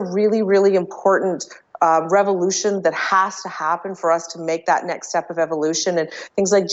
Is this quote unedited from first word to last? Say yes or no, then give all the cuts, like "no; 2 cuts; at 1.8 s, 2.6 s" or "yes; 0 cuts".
yes; 0 cuts